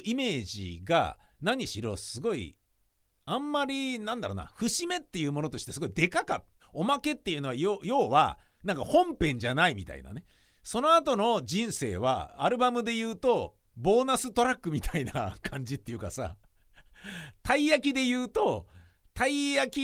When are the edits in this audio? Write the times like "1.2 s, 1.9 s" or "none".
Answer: 6.6 s